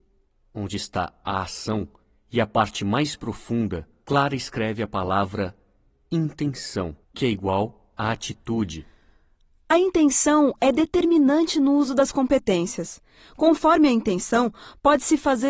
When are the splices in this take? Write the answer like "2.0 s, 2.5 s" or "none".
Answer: 4.1 s, 7.0 s